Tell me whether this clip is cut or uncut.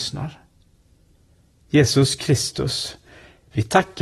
cut